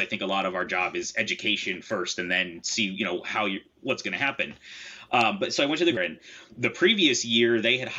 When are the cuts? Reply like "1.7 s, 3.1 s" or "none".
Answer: 6.0 s